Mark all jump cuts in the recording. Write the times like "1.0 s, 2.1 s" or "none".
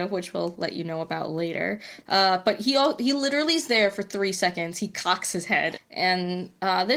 5.8 s